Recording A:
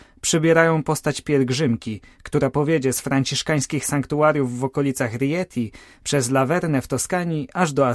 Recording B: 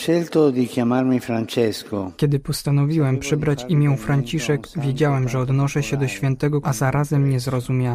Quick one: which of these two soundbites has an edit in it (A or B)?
B